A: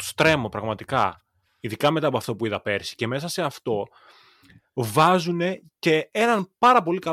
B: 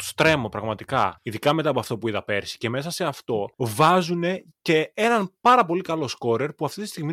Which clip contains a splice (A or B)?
B